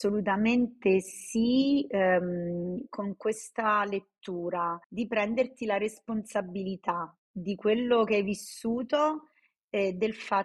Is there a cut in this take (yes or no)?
yes